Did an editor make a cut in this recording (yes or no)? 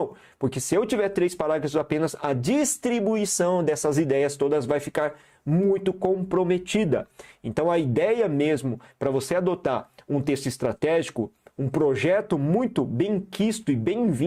no